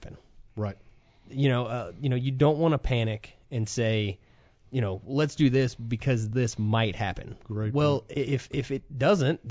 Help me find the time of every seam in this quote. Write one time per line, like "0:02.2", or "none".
none